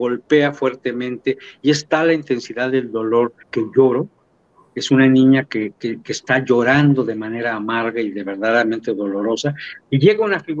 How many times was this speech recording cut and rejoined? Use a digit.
1